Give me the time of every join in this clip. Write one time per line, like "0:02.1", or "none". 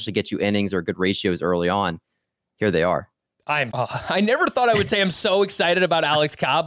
0:03.7